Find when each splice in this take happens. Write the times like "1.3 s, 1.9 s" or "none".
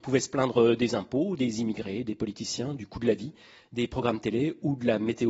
none